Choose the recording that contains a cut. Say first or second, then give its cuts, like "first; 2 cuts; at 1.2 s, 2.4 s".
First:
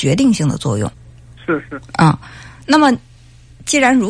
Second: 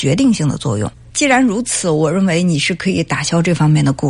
second; 1 cut; at 1.1 s